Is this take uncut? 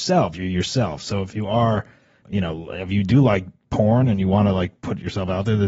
no; 1 cut; at 2.2 s

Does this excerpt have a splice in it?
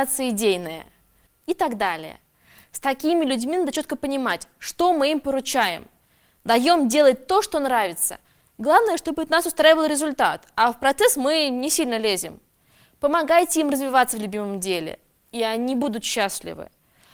yes; 1 cut; at 1.3 s

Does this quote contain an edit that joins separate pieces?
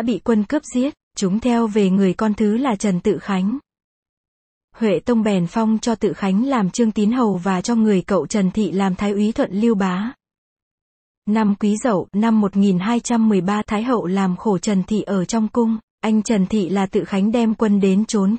no; 0 cuts

